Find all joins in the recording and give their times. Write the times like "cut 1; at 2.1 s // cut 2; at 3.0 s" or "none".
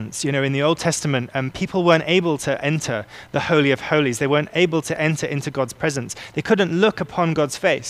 none